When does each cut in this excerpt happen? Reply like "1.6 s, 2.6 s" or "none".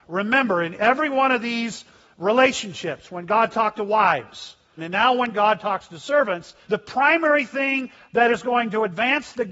4.8 s, 6.6 s